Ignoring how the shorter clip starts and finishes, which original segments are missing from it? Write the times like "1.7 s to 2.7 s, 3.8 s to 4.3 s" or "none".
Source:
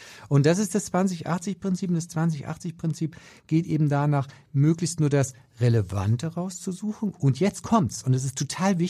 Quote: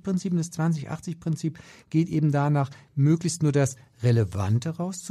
none

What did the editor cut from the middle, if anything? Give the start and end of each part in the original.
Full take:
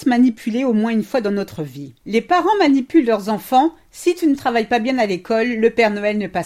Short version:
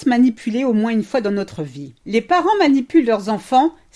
none

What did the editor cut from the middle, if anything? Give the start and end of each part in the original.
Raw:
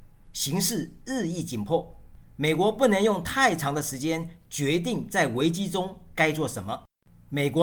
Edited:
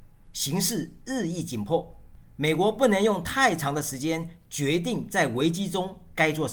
none

